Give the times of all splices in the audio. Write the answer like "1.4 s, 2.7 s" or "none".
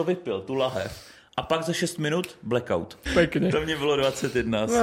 3.1 s

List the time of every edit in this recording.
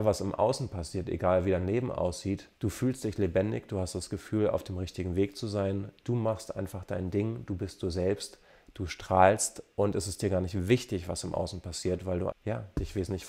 2.6 s, 12.3 s

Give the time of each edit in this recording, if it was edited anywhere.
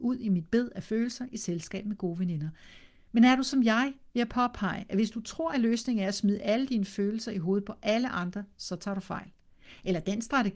none

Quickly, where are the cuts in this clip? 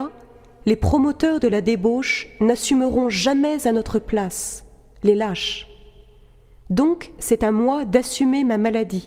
none

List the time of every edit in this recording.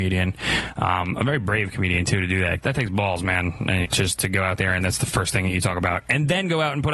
3.8 s

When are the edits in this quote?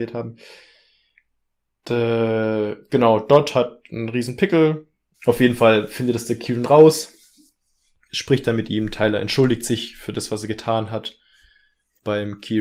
5.1 s

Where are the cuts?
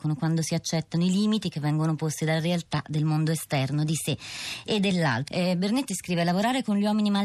5.3 s

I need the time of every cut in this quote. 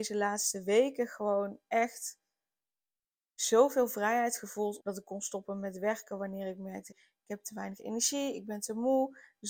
4.8 s, 6.9 s

